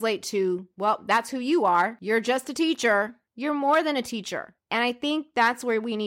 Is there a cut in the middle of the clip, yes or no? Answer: yes